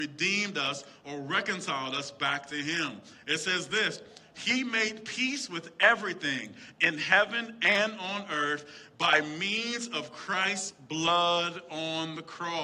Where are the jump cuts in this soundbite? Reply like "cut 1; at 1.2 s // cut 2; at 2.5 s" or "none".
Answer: none